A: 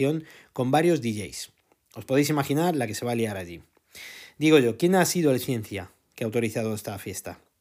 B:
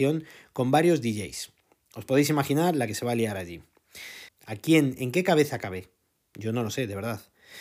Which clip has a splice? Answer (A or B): B